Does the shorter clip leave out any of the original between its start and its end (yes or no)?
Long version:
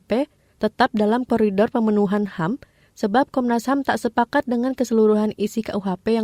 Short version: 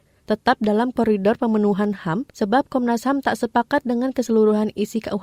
yes